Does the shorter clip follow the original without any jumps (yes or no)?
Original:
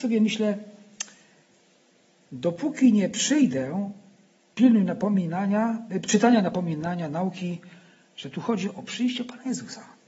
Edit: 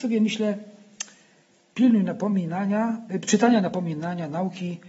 no